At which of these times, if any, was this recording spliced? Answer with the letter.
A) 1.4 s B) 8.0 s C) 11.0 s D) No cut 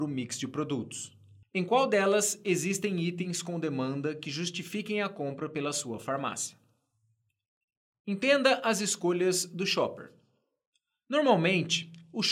A